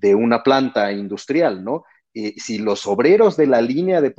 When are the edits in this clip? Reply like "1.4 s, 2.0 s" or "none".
2.4 s